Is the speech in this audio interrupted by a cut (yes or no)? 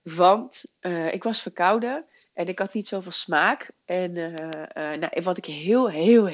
no